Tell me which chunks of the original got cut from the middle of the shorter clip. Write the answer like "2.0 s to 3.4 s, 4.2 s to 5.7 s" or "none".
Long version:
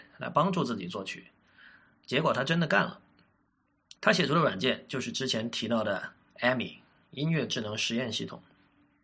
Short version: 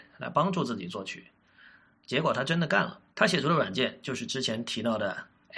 3.1 s to 4.0 s